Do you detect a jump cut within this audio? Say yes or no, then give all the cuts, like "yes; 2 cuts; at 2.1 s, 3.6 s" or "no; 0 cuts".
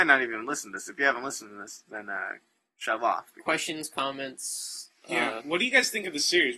no; 0 cuts